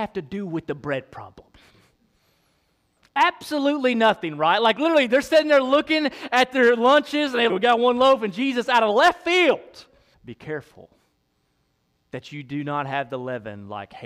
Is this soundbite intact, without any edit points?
no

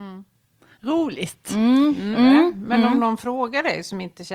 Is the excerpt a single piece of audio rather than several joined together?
no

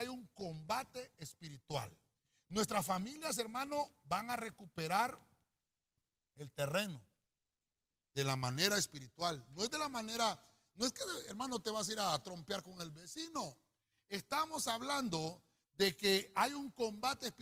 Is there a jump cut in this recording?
no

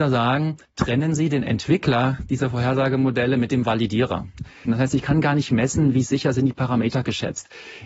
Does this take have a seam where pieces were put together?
yes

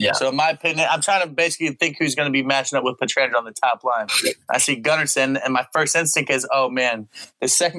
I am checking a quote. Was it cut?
no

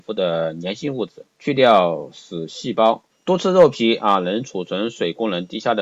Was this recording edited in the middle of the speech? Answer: yes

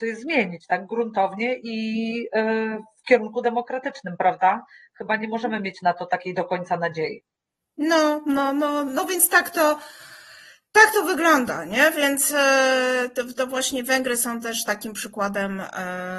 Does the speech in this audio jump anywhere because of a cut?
no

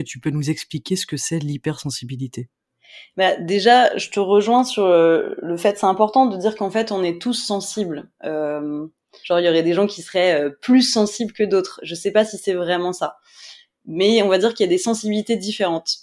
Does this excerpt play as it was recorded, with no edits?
no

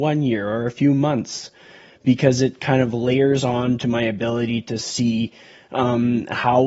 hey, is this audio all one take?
yes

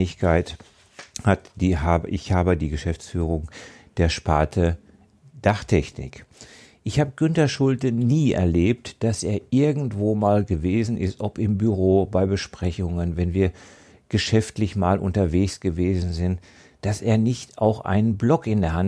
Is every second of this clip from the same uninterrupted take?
yes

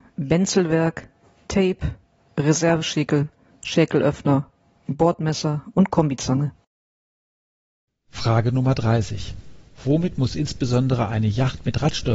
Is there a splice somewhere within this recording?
no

